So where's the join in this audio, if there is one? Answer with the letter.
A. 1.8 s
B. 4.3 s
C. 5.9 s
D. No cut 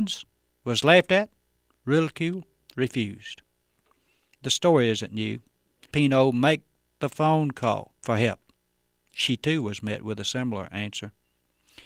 C